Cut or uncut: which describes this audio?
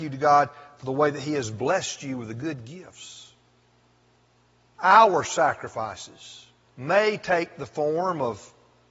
cut